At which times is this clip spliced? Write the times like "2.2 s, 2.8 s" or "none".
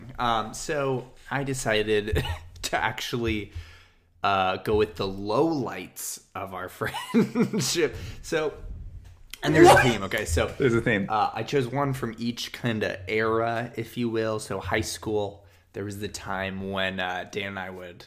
none